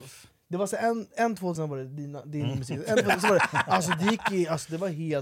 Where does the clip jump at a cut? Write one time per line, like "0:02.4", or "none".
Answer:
0:01.6